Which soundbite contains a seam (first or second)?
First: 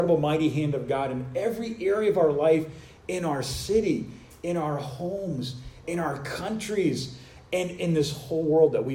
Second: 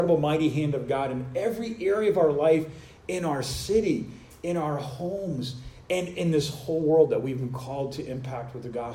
second